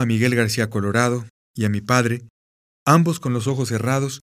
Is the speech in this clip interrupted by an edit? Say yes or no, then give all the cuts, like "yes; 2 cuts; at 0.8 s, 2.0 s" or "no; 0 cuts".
no; 0 cuts